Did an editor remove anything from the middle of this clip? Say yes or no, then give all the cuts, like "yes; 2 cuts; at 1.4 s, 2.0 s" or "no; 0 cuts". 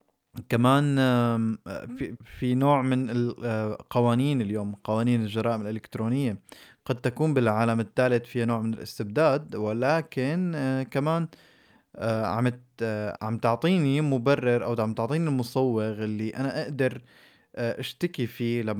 yes; 2 cuts; at 2.2 s, 13.2 s